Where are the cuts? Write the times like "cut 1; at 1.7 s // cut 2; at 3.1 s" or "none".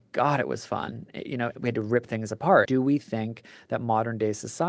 cut 1; at 1.6 s // cut 2; at 2.7 s